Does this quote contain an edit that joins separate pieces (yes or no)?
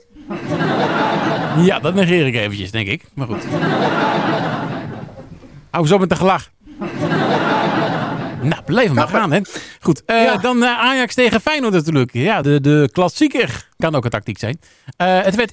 yes